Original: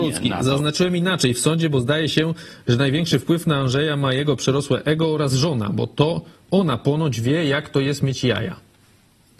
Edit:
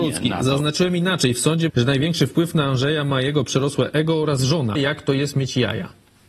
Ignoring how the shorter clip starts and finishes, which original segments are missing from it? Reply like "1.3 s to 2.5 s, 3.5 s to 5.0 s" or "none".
1.7 s to 2.6 s, 5.7 s to 7.4 s

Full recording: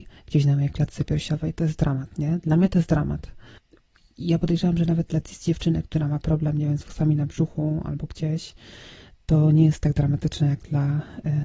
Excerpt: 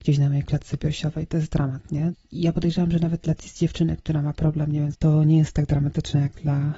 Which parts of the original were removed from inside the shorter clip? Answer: 2.4 s to 4.0 s, 6.8 s to 9.2 s

